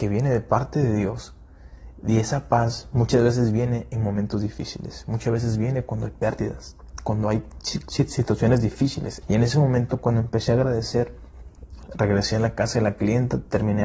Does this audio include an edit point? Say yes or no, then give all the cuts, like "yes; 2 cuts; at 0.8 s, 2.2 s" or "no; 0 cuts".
yes; 2 cuts; at 9.2 s, 11.9 s